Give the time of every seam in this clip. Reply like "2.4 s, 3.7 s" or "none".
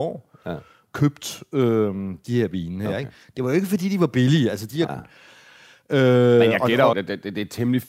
4.9 s, 6.9 s